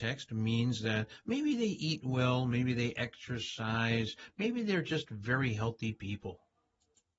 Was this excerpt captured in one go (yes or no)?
yes